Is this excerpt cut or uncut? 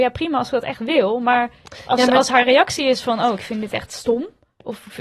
uncut